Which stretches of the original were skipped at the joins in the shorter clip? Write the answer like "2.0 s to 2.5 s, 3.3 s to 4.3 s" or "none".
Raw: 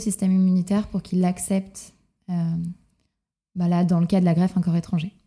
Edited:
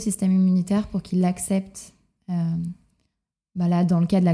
none